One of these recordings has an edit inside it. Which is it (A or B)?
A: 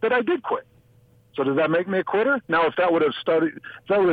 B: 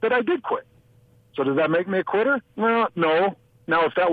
A